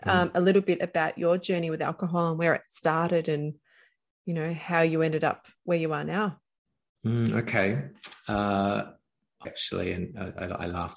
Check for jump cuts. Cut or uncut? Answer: cut